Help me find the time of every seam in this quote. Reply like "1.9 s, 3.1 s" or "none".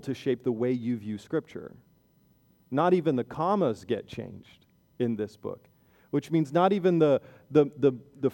2.6 s